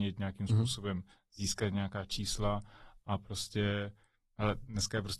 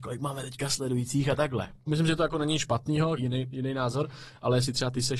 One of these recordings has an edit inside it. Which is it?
second; 2 cuts; at 1.9 s, 3.2 s

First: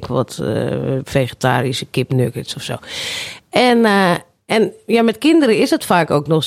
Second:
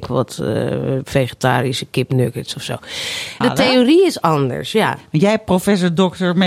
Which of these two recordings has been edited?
second; 1 cut; at 3.4 s

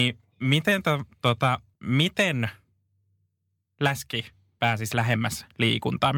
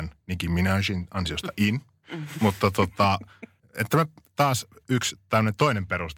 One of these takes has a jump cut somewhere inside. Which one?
first; 1 cut; at 1.7 s

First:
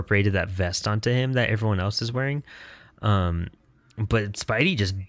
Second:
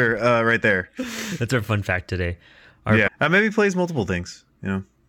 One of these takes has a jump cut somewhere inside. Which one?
second; 1 cut; at 3.1 s

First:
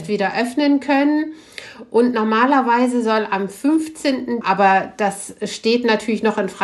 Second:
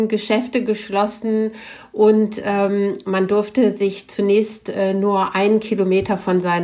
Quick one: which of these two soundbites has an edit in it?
first; 1 cut; at 4.4 s

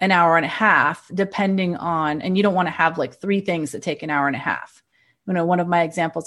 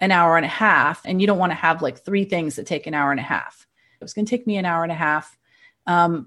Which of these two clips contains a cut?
second; 2 cuts; at 1.0 s, 4.0 s

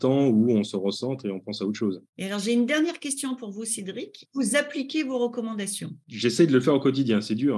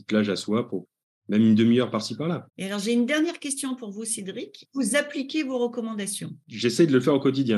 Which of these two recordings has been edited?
second; 1 cut; at 2.5 s

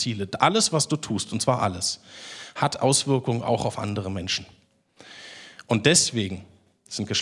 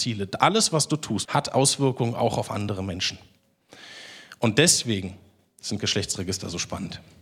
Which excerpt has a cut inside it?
second; 1 cut; at 1.3 s

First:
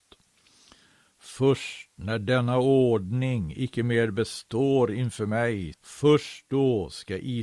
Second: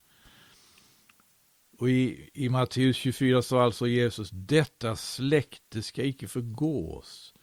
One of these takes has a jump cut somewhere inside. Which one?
first; 1 cut; at 5.7 s

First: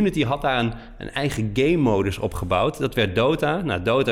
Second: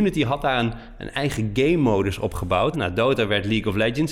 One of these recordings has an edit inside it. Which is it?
second; 1 cut; at 2.7 s

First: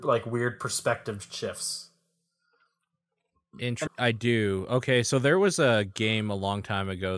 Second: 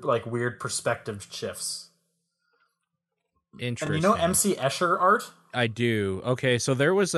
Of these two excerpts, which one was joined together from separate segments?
first; 1 cut; at 3.9 s

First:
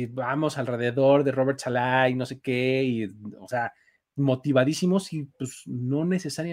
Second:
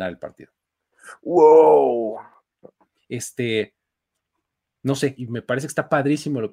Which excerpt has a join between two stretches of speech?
second; 2 cuts; at 3.0 s, 5.2 s

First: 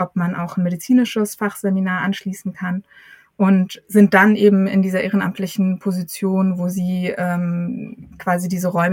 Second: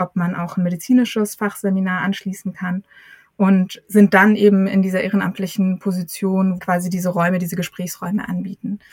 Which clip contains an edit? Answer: second; 1 cut; at 6.6 s

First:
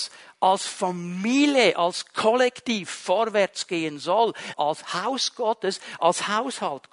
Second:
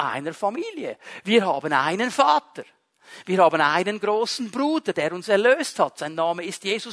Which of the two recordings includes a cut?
first; 2 cuts; at 4.5 s, 6.0 s

